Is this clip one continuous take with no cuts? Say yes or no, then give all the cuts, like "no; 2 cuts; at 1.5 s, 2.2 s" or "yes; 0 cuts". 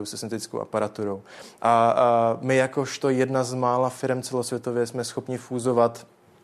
yes; 0 cuts